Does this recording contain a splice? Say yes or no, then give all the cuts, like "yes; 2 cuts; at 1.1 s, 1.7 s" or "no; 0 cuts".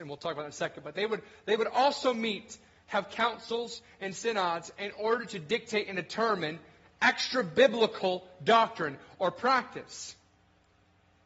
no; 0 cuts